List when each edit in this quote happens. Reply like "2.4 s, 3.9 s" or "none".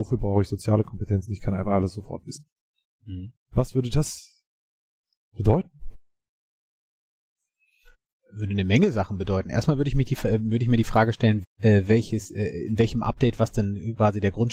11.4 s